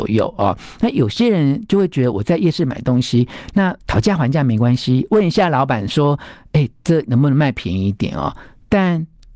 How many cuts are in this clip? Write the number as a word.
one